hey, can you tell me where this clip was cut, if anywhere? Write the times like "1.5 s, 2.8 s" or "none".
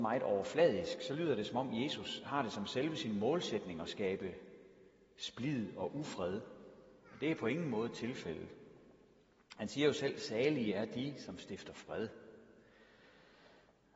none